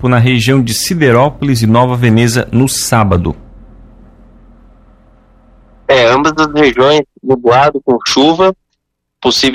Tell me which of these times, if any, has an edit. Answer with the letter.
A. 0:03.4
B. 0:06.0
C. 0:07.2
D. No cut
D